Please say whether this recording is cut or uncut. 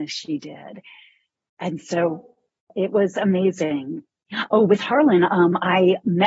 uncut